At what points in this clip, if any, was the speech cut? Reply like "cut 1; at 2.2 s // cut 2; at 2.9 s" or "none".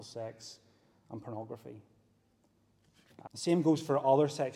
cut 1; at 3.3 s